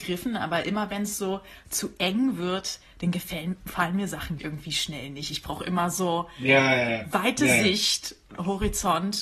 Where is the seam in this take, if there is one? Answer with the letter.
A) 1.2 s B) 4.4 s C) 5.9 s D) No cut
B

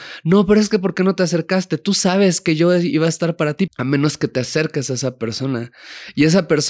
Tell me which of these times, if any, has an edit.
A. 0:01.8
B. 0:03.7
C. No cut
B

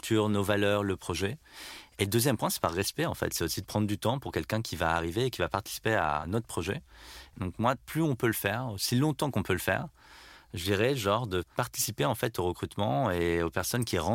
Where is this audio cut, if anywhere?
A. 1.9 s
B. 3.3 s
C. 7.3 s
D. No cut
C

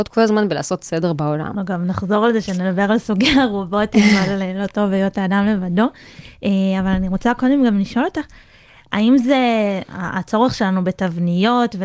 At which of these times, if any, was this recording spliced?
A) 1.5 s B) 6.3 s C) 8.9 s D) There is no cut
A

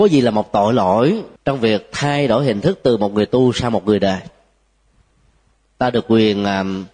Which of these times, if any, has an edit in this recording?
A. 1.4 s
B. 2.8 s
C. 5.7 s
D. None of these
A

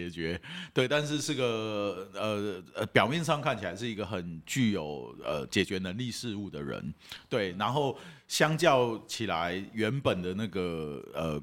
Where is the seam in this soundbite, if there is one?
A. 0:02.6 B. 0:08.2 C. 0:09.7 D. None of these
D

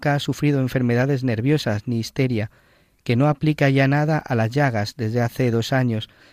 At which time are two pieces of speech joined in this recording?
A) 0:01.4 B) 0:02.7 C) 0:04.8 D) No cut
D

